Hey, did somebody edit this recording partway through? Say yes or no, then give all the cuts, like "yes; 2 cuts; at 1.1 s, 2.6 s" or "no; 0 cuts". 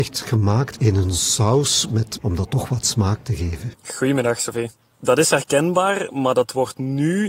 yes; 2 cuts; at 2.2 s, 3.7 s